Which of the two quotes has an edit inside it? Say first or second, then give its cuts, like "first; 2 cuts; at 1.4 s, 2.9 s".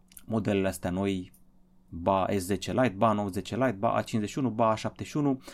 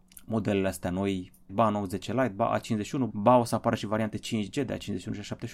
second; 2 cuts; at 1.5 s, 3.1 s